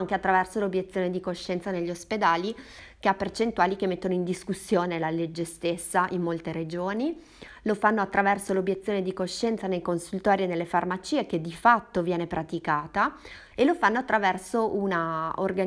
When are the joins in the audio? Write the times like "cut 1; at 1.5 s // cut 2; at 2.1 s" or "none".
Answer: cut 1; at 13.5 s